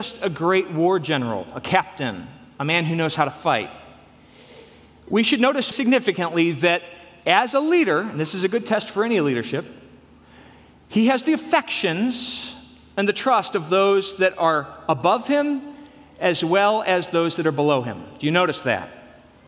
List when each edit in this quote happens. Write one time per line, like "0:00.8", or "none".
0:05.7